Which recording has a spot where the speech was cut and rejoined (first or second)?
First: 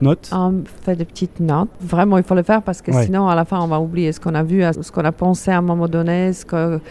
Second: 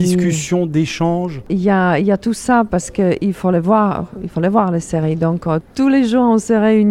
first